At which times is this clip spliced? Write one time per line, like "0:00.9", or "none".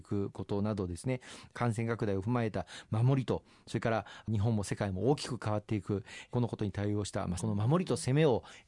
0:07.4